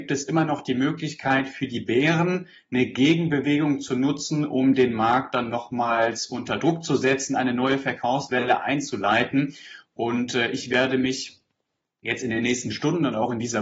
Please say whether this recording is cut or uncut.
uncut